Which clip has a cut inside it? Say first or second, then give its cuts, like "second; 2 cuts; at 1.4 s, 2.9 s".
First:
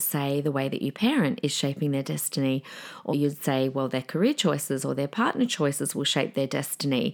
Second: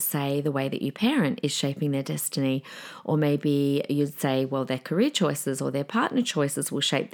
first; 1 cut; at 3.1 s